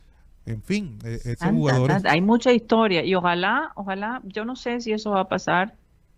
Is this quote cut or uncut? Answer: uncut